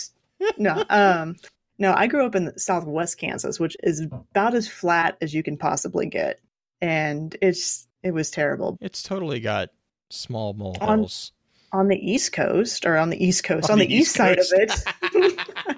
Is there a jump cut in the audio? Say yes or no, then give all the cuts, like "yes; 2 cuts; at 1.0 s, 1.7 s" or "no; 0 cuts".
yes; 1 cut; at 8.7 s